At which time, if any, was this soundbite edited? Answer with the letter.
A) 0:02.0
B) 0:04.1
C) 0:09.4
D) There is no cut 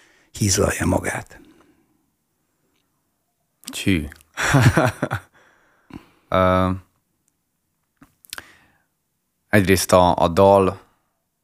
D